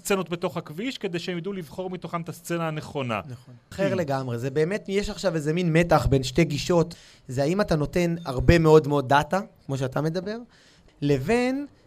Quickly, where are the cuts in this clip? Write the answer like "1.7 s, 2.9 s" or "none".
3.7 s, 10.9 s